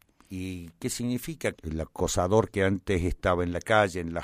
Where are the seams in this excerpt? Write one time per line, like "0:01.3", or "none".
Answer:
0:01.5